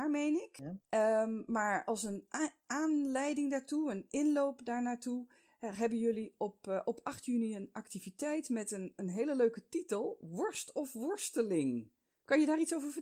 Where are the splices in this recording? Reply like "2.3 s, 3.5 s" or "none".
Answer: none

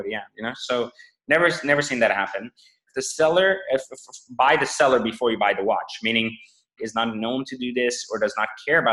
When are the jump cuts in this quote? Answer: 2.9 s, 6.8 s

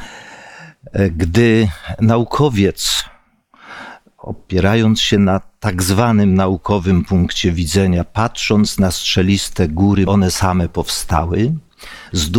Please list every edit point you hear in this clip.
10.0 s

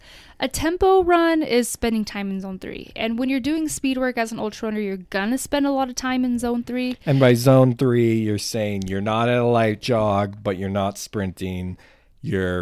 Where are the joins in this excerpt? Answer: none

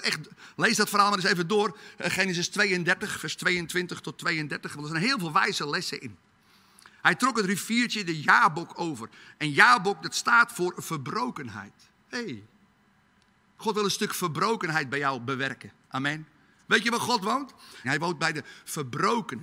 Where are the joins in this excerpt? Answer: 16.6 s, 17.8 s

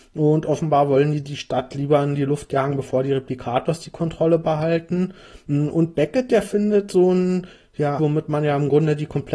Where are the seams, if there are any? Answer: 8.0 s

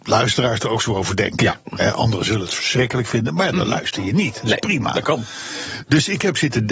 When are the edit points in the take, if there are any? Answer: none

